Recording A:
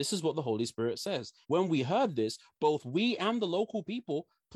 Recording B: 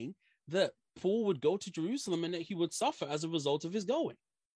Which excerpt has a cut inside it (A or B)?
A